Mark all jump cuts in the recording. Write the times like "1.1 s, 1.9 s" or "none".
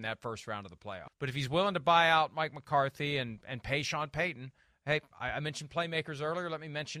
1.1 s